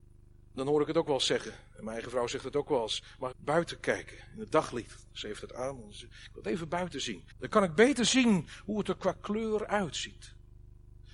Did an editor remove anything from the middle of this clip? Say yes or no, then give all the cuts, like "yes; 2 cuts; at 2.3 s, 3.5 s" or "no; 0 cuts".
yes; 2 cuts; at 3.3 s, 7.3 s